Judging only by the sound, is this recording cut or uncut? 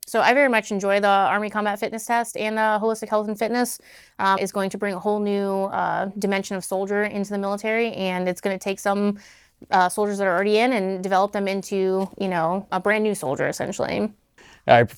cut